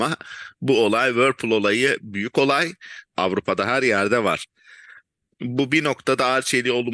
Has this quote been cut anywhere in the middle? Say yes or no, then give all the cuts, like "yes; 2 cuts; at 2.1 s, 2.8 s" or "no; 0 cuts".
yes; 2 cuts; at 3.1 s, 5.3 s